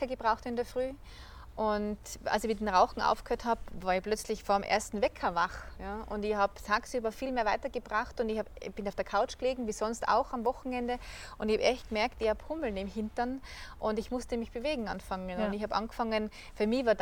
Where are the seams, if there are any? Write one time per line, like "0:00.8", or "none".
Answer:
none